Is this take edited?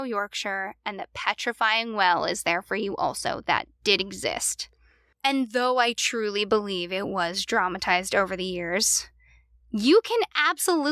yes; 1 cut; at 5.1 s

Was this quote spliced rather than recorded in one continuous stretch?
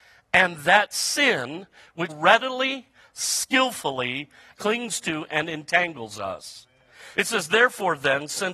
yes; 3 cuts; at 2.1 s, 4.5 s, 7.1 s

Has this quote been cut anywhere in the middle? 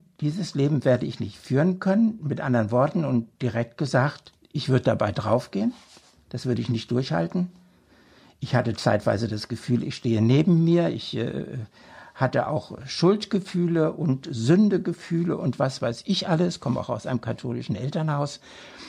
no; 0 cuts

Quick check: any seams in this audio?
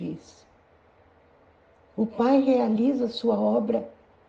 no; 0 cuts

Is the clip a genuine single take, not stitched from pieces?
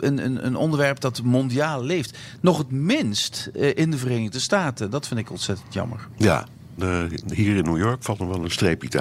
no; 1 cut; at 6.8 s

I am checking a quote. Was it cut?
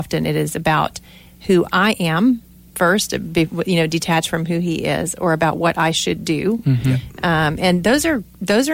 no; 0 cuts

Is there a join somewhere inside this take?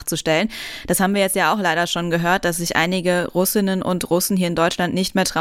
no; 0 cuts

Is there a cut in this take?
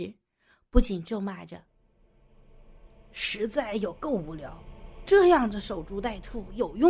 no; 0 cuts

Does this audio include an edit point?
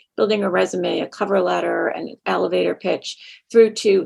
no; 0 cuts

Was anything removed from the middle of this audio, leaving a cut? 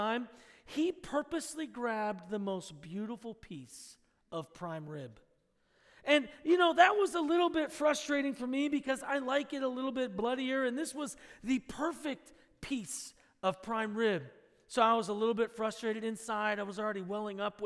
no; 0 cuts

